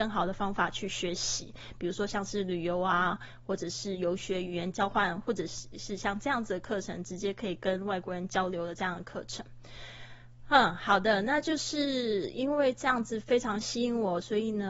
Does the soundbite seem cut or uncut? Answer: uncut